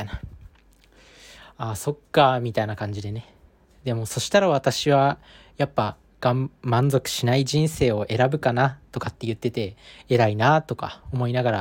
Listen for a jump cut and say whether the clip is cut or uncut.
uncut